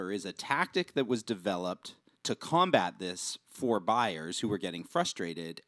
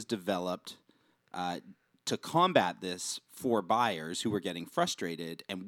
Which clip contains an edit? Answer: first; 1 cut; at 2.1 s

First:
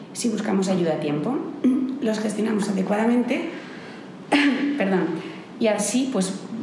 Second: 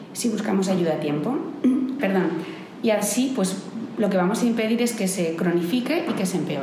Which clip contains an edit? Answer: second; 1 cut; at 2.0 s

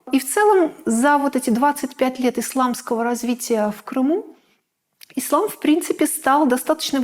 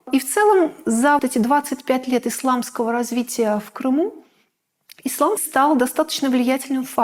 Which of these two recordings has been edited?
second; 2 cuts; at 1.2 s, 5.4 s

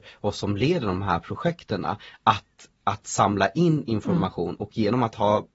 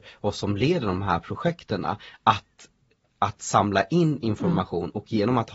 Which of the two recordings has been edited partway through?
first; 1 cut; at 2.8 s

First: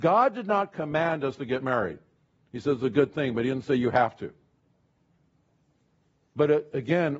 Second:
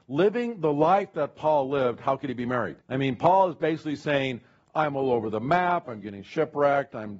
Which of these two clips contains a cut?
second; 2 cuts; at 2.8 s, 5.8 s

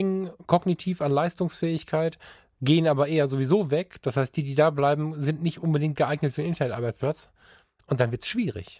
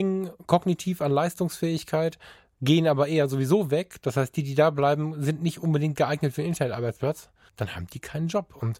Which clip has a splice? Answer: second; 1 cut; at 7.5 s

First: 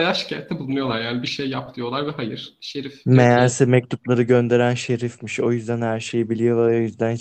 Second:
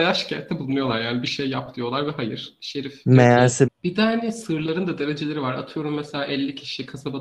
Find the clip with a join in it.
second; 1 cut; at 3.7 s

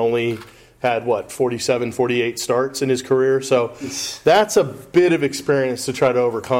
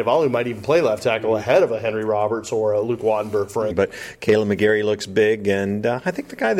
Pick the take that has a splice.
second; 1 cut; at 3.7 s

